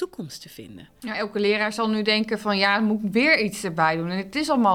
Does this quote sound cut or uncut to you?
uncut